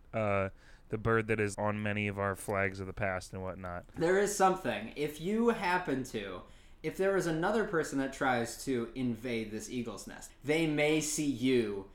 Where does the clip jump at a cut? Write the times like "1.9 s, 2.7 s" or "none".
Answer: 1.5 s, 10.3 s